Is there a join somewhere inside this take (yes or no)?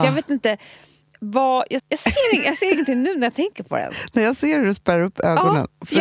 yes